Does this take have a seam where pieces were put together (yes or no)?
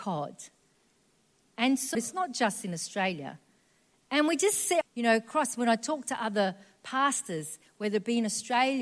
yes